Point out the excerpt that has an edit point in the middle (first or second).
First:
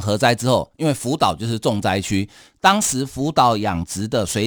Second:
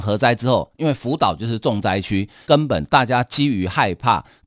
second